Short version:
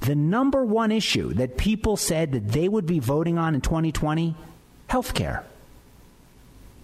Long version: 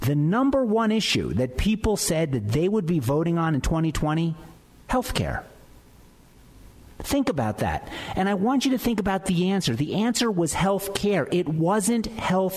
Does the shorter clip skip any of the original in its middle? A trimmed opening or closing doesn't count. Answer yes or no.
no